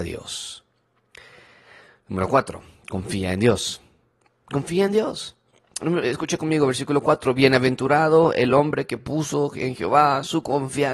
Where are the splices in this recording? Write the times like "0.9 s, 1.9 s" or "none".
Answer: none

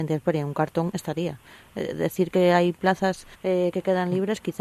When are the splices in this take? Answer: 3.3 s

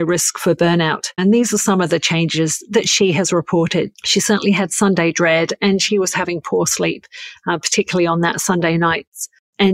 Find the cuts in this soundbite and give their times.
1.2 s, 3.9 s

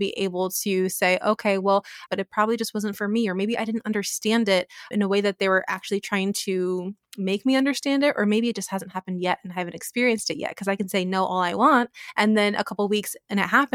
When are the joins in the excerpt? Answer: 2.1 s, 4.9 s

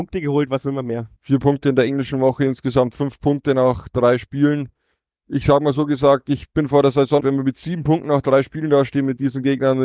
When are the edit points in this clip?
1.2 s, 7.2 s

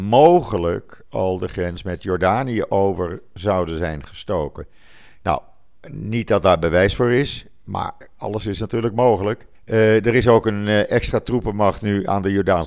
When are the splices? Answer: 5.8 s, 9.5 s

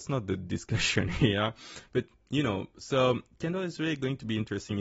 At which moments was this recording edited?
none

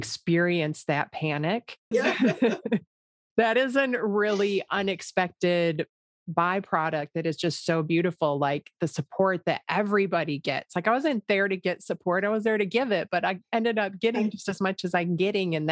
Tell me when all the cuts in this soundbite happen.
1.9 s

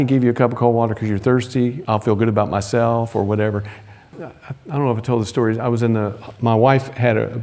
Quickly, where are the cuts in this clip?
1.9 s, 4.1 s

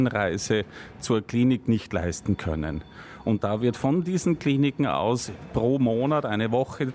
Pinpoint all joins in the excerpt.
none

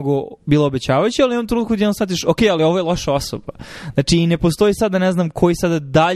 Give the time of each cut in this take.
none

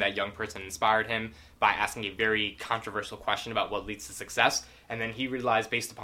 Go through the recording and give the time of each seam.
none

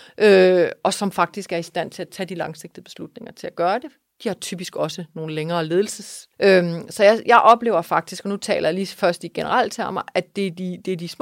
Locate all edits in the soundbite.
6.3 s

